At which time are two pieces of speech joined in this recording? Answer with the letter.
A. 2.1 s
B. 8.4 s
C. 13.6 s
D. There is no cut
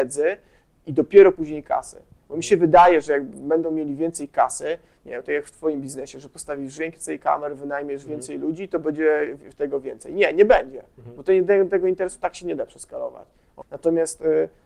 C